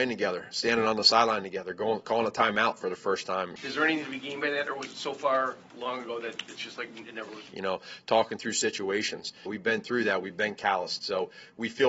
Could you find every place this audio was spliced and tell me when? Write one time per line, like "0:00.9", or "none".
0:03.6
0:07.5
0:09.5